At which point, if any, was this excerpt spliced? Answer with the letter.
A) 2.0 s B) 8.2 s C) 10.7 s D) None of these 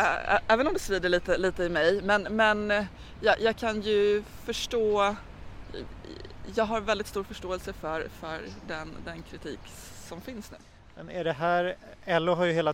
D